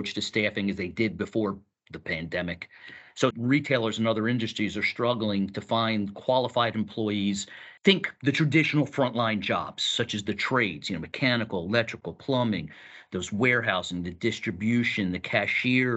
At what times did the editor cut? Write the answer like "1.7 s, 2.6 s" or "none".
3.3 s, 7.8 s